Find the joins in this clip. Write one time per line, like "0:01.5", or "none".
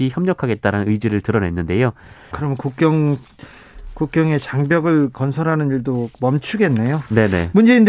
0:02.3